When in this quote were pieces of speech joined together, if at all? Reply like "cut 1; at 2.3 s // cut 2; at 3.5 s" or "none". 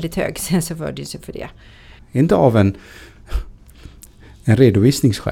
cut 1; at 2.0 s